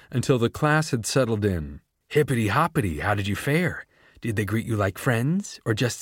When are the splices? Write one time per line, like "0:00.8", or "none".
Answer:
0:02.0